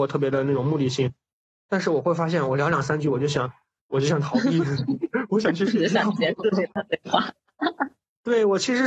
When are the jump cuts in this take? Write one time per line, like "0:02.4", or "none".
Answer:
none